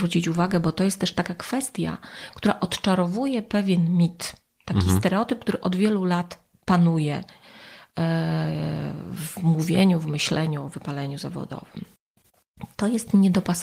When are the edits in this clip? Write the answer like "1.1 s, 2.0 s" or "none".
none